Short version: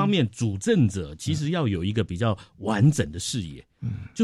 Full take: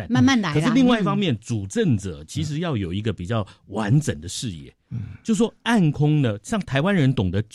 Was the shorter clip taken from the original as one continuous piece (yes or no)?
yes